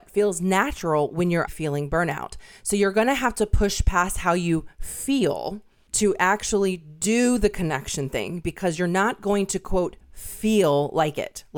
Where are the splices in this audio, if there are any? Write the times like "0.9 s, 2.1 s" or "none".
1.5 s

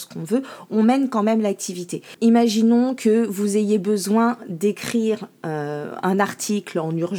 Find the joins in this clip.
2.2 s

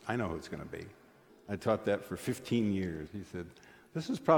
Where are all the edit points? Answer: 1.3 s, 3.1 s

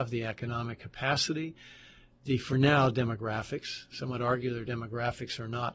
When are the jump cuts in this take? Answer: none

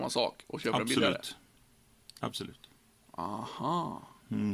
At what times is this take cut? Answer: none

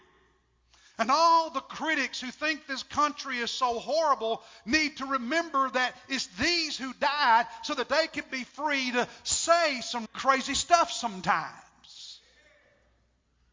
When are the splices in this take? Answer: 10.1 s

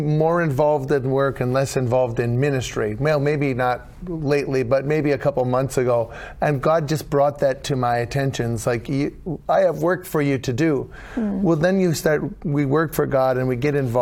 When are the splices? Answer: none

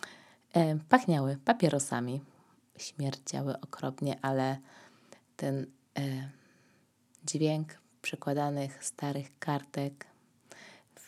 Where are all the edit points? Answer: none

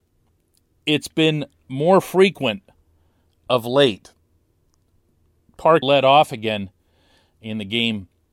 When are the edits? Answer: 5.8 s

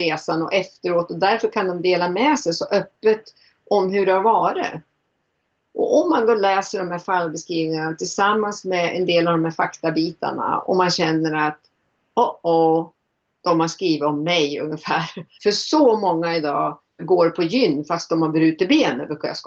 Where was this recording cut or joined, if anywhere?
15.3 s, 17.0 s

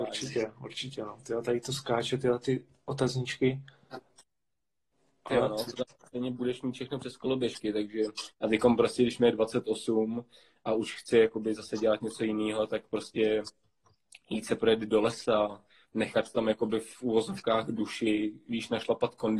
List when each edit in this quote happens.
8.3 s

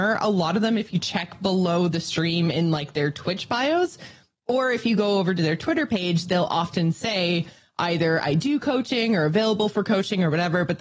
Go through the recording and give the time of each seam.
none

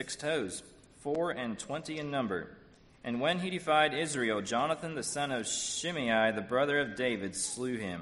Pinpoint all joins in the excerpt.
2.9 s

